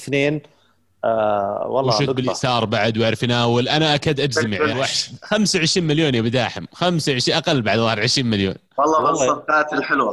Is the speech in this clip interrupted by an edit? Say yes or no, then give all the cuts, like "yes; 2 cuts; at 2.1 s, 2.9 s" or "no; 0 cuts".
yes; 1 cut; at 4.7 s